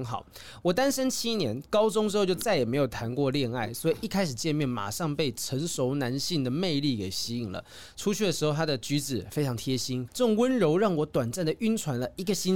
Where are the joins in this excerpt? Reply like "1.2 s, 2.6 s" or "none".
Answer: 10.1 s